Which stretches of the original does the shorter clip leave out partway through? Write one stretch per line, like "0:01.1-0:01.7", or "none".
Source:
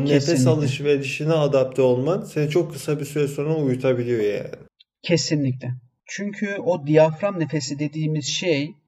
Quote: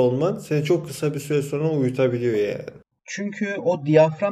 0:04.8-0:05.9